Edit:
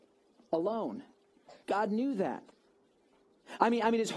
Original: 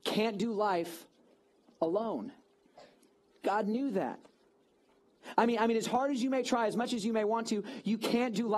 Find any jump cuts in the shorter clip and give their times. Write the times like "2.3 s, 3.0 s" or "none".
1.6 s